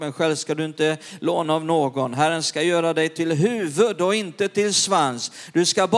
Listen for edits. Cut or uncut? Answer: uncut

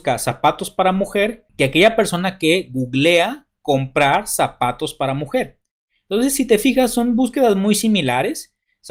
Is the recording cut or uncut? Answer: uncut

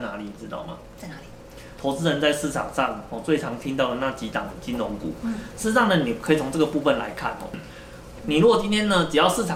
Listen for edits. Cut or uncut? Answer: cut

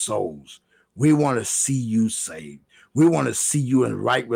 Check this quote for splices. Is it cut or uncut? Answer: uncut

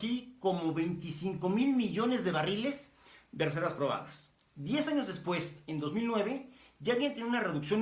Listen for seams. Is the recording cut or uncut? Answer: uncut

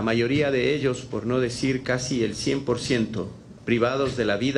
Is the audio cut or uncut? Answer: cut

